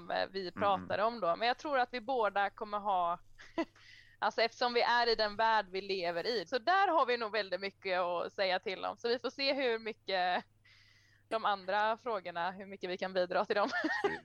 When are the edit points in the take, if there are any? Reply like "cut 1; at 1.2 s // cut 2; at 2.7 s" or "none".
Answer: cut 1; at 6.5 s